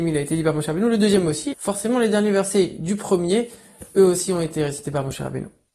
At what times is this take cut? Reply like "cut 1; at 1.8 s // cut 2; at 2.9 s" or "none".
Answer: cut 1; at 1.5 s